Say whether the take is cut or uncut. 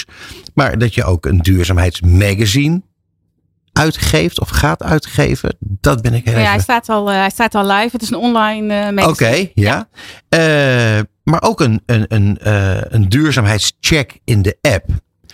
uncut